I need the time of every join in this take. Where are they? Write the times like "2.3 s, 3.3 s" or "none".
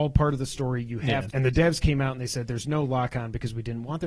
1.3 s